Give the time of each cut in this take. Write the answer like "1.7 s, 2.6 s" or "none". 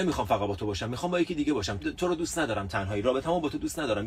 1.8 s